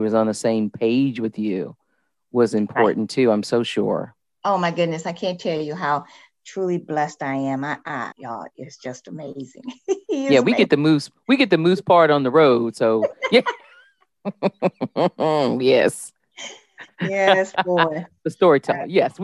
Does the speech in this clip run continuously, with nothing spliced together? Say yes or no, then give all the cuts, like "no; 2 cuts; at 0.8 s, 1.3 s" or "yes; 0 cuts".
no; 1 cut; at 8.1 s